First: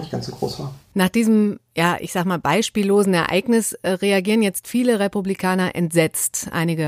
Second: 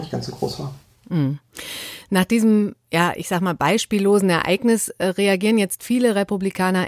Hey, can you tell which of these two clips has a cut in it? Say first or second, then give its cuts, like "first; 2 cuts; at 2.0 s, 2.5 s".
first; 1 cut; at 0.9 s